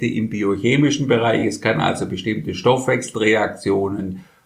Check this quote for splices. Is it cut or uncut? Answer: uncut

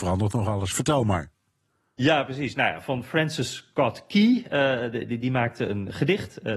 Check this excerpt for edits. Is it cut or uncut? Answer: uncut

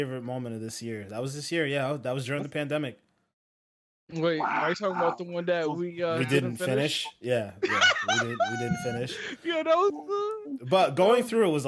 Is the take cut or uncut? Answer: uncut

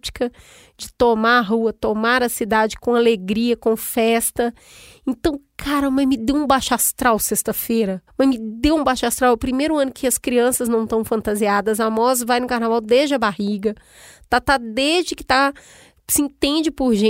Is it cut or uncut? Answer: uncut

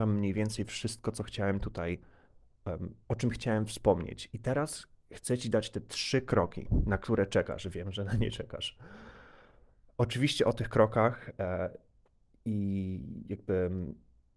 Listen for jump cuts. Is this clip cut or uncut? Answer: uncut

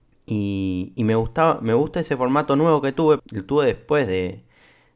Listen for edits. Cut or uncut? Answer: cut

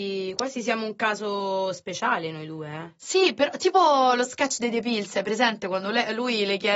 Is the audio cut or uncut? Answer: uncut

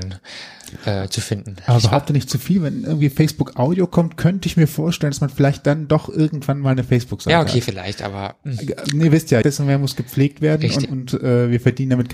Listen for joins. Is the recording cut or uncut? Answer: cut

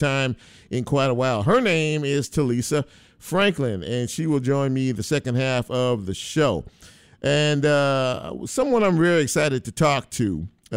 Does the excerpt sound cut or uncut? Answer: uncut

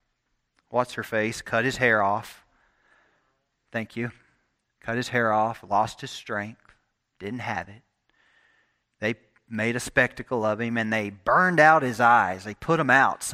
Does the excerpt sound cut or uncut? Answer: uncut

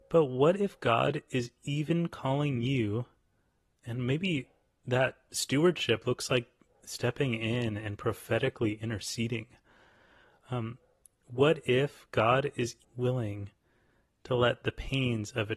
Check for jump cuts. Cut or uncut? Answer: cut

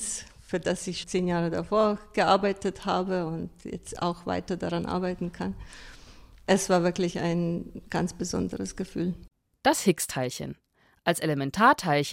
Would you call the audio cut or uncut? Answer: cut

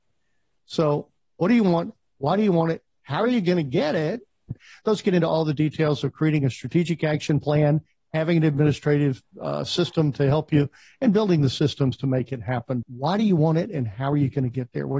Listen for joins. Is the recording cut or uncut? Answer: cut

